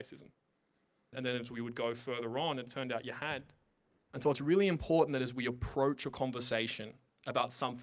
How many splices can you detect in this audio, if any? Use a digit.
2